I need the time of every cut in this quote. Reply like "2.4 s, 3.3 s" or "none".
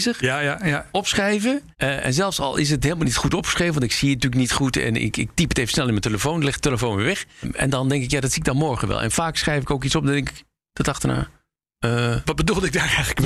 1.7 s, 7.4 s